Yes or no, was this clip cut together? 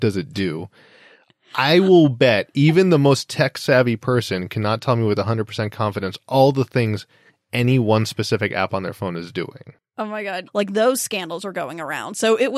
yes